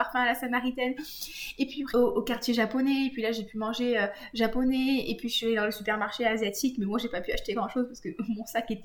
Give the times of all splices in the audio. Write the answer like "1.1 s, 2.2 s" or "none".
1.9 s

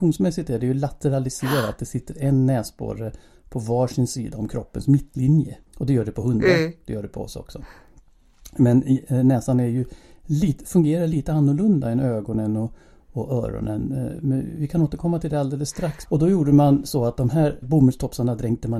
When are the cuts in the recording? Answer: 5.7 s, 16.1 s, 17.6 s

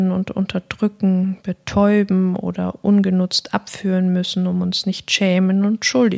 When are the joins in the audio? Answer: none

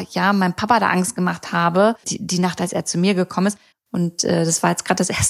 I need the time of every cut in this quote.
2.0 s, 3.7 s

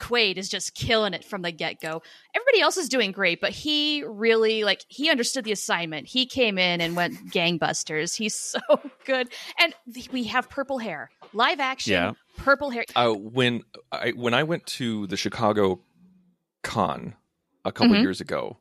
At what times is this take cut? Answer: 12.8 s

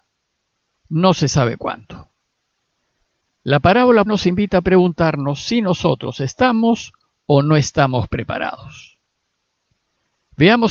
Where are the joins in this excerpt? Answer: 4.1 s

